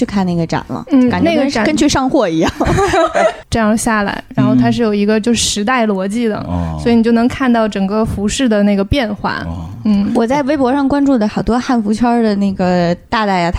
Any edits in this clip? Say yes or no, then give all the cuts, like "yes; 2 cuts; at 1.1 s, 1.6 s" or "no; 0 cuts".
yes; 1 cut; at 3.4 s